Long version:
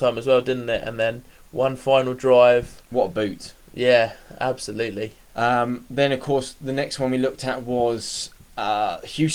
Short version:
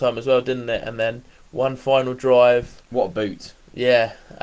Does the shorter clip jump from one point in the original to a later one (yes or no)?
no